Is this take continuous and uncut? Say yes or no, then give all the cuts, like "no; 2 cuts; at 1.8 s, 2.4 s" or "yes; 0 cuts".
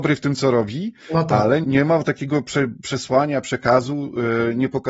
no; 1 cut; at 1.6 s